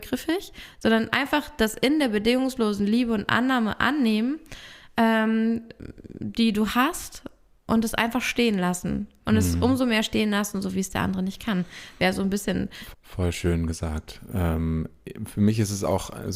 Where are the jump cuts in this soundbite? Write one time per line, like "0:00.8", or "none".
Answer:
0:12.9